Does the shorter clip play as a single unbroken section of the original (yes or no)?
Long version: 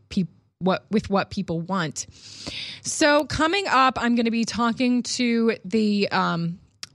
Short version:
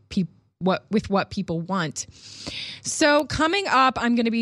yes